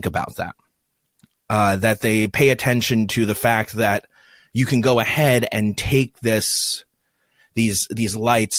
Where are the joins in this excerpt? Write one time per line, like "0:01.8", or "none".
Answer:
none